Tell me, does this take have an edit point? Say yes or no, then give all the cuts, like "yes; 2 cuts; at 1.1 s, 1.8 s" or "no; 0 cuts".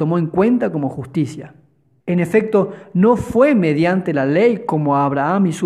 yes; 1 cut; at 2.0 s